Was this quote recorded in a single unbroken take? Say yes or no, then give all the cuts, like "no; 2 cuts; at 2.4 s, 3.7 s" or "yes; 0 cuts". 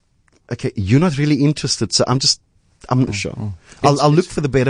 no; 1 cut; at 3.1 s